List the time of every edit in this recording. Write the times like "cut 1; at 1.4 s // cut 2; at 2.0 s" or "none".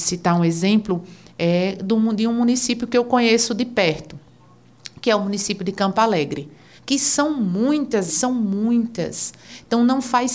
cut 1; at 6.8 s // cut 2; at 8.1 s